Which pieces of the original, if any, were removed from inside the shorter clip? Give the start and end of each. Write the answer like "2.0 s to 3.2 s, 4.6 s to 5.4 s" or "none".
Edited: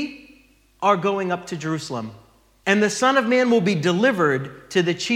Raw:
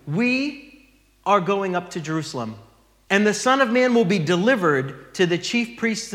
none